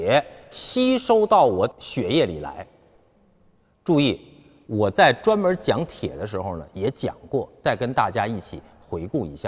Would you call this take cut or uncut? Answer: cut